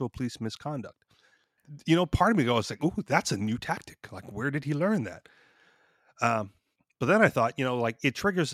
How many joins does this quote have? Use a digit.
1